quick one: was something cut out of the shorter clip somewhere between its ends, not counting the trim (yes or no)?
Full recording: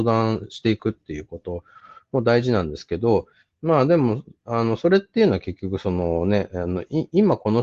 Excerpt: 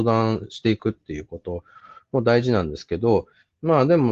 no